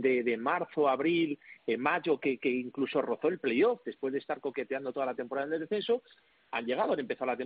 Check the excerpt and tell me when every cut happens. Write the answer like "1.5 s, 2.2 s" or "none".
none